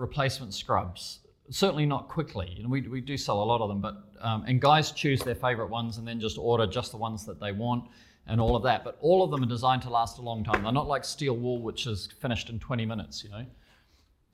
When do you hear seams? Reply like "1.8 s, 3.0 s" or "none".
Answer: none